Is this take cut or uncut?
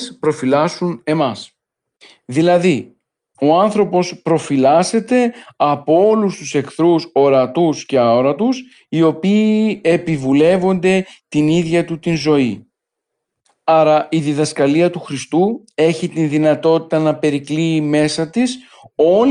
cut